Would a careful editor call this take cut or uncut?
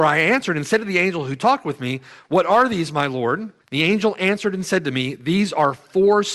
cut